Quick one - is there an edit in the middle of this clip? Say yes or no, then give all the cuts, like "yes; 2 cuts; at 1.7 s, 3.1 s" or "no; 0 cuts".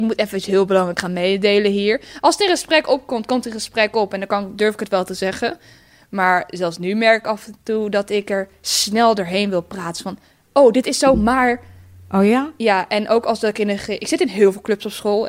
no; 0 cuts